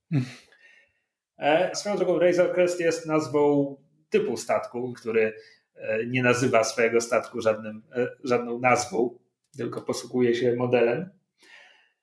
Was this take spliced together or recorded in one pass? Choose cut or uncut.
cut